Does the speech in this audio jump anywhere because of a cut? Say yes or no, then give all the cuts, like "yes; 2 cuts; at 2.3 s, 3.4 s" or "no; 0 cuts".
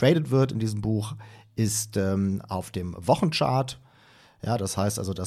no; 0 cuts